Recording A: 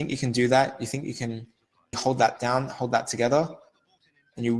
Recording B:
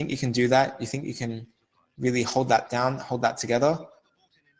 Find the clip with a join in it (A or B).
A